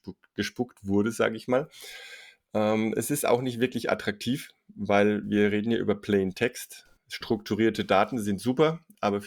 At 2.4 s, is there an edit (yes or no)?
no